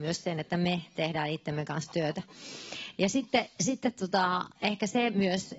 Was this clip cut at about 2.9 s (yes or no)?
no